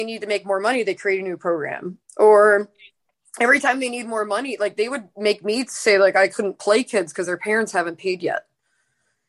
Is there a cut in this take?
no; 0 cuts

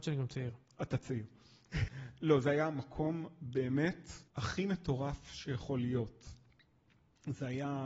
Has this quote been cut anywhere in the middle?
yes; 2 cuts; at 1.9 s, 4.3 s

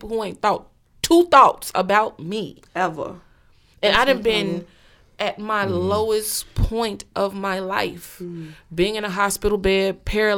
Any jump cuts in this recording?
no; 0 cuts

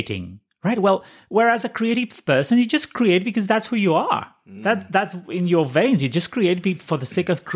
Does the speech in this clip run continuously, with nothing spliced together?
yes; 0 cuts

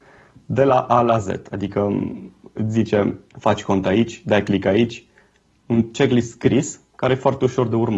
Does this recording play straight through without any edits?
no; 1 cut; at 3.3 s

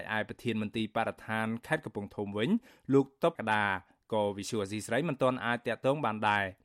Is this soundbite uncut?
no; 1 cut; at 3.4 s

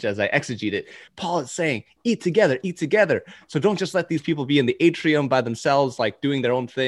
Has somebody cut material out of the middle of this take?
no; 0 cuts

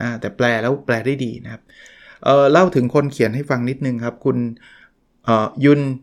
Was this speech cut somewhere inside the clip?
no; 0 cuts

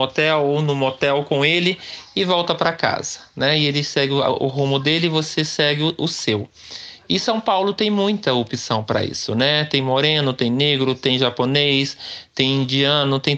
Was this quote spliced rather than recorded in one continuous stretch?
no; 0 cuts

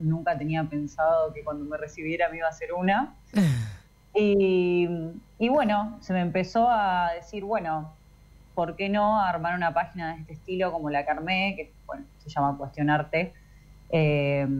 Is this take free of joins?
yes; 0 cuts

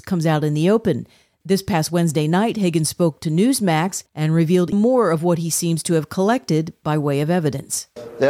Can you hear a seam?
yes; 1 cut; at 4.7 s

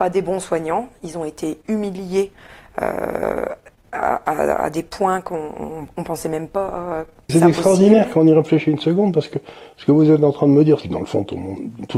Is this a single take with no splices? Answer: no; 2 cuts; at 7.3 s, 10.8 s

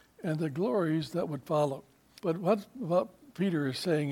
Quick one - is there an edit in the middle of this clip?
yes; 1 cut; at 2.2 s

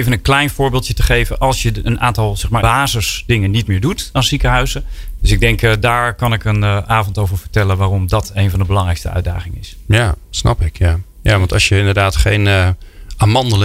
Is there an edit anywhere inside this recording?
yes; 2 cuts; at 2.6 s, 5.2 s

